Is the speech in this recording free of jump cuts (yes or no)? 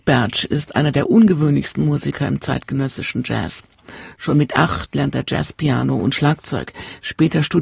yes